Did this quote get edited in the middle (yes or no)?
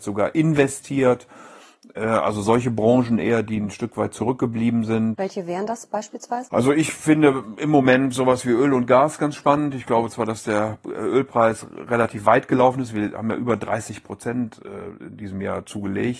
no